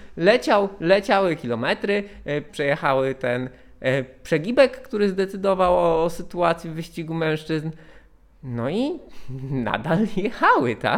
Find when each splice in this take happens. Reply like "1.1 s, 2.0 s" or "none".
2.5 s

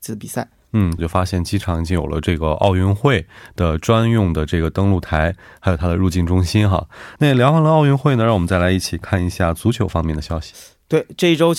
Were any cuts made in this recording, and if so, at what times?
1.0 s, 7.2 s

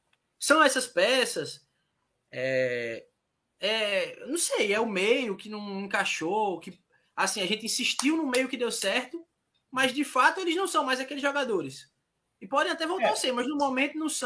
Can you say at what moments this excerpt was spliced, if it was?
none

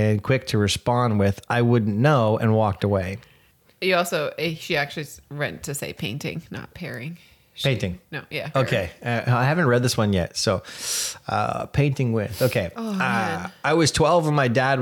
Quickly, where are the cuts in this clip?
8.5 s

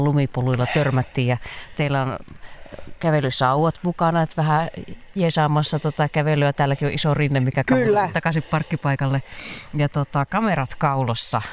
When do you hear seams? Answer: none

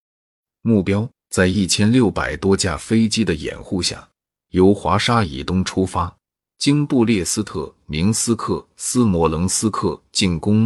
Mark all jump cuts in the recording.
none

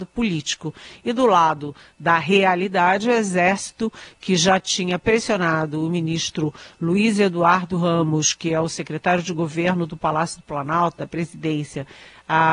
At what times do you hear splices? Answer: none

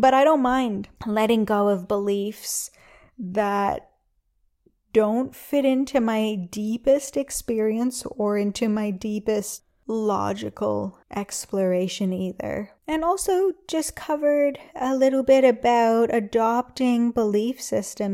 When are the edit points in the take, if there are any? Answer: 11.0 s, 12.8 s

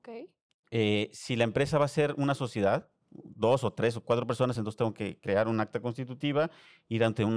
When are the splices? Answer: none

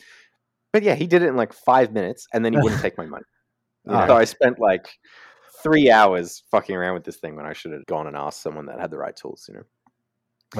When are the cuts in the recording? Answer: 4.1 s, 7.8 s

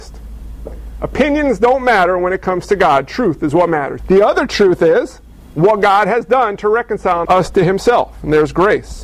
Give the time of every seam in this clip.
4.0 s, 7.3 s

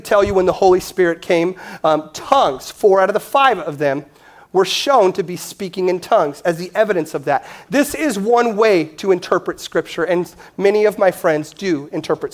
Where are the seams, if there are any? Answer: none

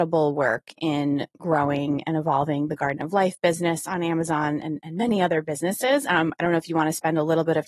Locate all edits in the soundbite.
none

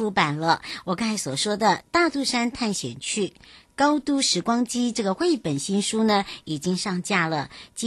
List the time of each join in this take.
none

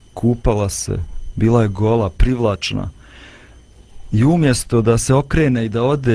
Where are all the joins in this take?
none

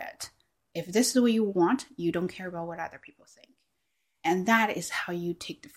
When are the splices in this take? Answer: none

